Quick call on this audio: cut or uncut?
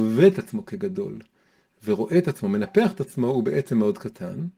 uncut